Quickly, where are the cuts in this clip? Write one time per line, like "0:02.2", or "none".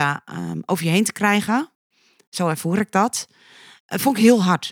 none